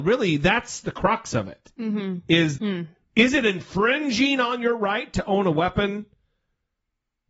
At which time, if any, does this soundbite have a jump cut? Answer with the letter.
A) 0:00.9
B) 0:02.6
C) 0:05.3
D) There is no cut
B